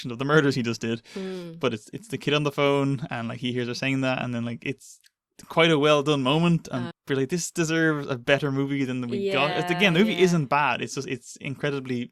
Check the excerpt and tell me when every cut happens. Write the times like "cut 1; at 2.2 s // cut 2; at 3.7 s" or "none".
cut 1; at 6.9 s